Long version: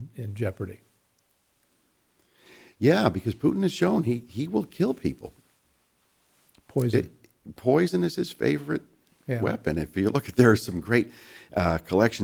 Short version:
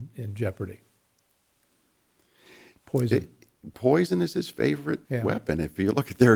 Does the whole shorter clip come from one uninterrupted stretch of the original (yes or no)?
no